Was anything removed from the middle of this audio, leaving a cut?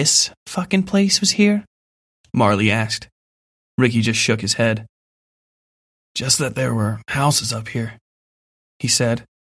no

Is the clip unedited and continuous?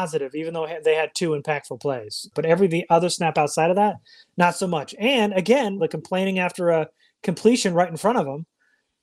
no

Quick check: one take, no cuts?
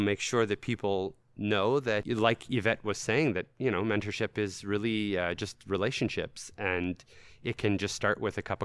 yes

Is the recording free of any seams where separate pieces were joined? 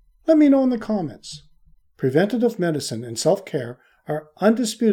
no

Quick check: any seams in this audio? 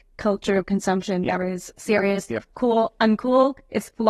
yes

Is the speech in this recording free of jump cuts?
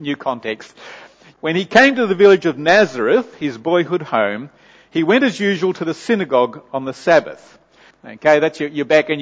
no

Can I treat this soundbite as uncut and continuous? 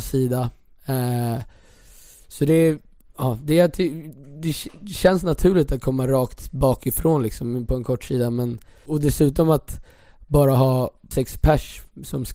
no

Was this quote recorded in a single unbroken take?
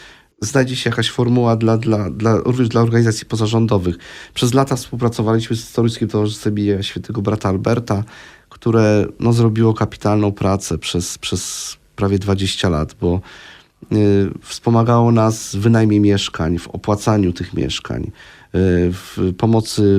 yes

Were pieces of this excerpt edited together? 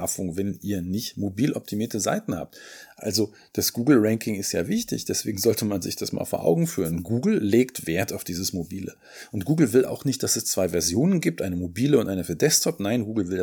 no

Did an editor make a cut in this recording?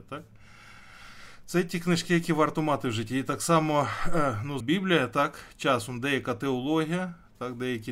yes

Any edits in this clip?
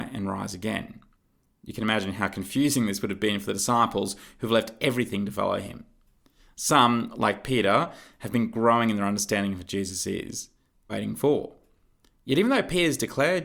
yes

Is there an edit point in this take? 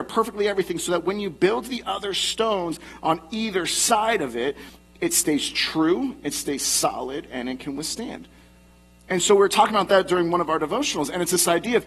no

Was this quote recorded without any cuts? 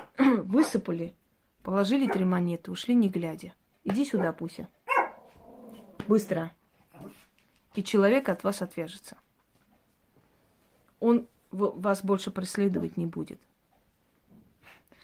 yes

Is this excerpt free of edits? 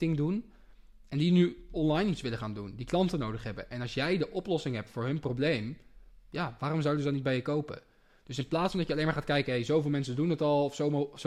yes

